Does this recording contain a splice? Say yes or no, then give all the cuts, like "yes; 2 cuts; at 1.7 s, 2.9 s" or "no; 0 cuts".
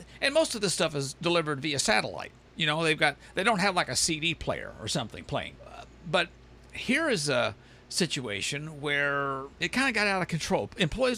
yes; 2 cuts; at 5.6 s, 9.5 s